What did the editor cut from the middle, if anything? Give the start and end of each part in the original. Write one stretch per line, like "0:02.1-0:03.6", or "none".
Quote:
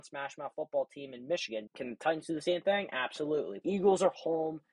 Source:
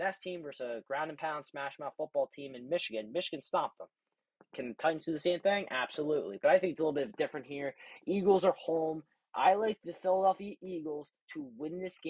0:03.1-0:04.4
0:06.4-0:08.0